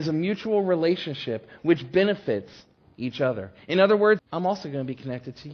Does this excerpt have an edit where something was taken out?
yes; 1 cut; at 4.2 s

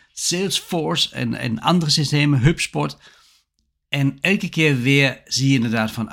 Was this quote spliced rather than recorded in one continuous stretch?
no; 0 cuts

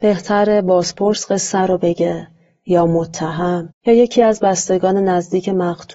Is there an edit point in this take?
yes; 1 cut; at 3.7 s

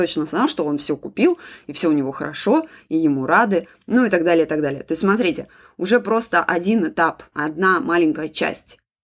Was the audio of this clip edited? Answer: yes; 1 cut; at 7.3 s

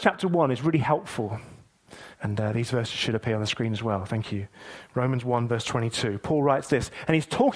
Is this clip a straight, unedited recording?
no; 1 cut; at 2.1 s

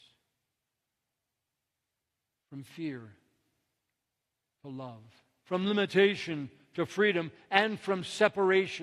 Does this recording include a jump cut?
yes; 1 cut; at 5.4 s

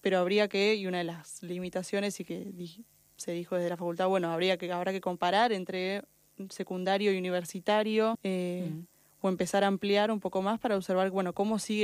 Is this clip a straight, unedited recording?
no; 1 cut; at 8.1 s

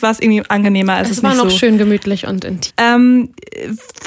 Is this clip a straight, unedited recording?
no; 1 cut; at 2.7 s

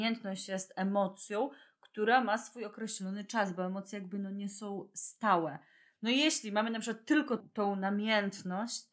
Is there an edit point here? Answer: no; 0 cuts

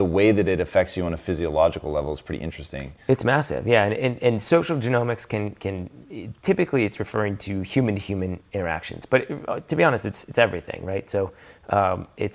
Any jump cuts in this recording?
no; 0 cuts

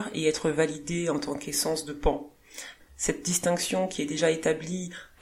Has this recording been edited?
yes; 1 cut; at 2.8 s

